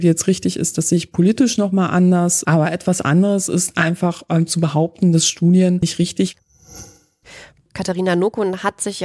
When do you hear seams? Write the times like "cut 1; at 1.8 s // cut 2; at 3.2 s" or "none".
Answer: none